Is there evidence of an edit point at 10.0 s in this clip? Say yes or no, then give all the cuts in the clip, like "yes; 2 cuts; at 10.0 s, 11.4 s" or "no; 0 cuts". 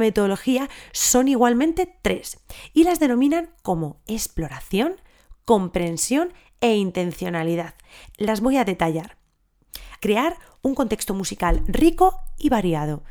yes; 2 cuts; at 8.1 s, 10.0 s